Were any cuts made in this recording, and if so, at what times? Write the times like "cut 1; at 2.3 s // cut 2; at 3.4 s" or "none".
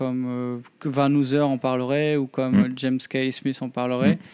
none